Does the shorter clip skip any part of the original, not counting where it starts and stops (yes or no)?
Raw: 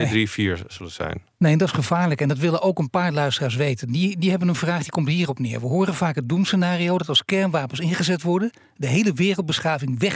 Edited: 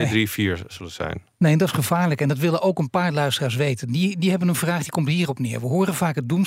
no